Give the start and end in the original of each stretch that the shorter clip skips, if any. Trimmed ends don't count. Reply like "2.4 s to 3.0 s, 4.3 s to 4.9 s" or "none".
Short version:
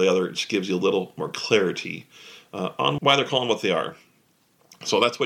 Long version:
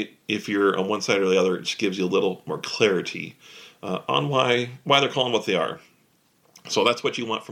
4.3 s to 4.8 s